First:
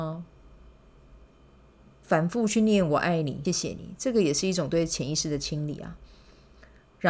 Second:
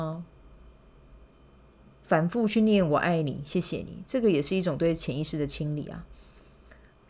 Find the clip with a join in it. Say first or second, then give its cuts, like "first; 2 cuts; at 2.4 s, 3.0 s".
first; 1 cut; at 3.5 s